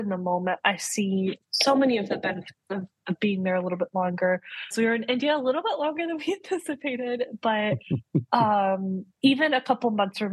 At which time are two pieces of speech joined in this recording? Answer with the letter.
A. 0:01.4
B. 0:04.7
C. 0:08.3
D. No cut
B